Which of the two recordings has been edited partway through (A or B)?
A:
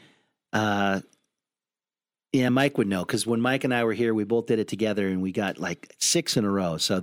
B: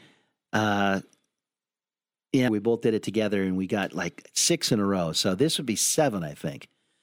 B